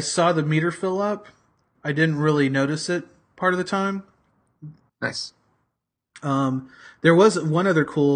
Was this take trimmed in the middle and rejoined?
yes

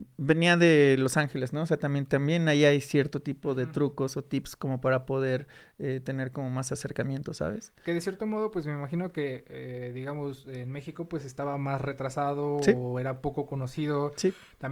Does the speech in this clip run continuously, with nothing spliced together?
yes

